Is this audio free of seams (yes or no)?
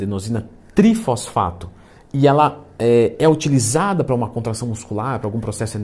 yes